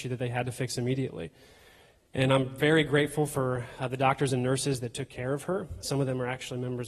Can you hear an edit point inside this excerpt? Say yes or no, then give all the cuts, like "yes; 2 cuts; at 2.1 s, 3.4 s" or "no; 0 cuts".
no; 0 cuts